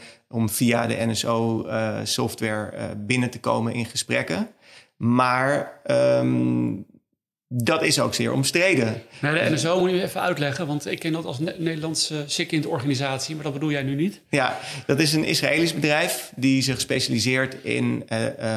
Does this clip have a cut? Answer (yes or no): no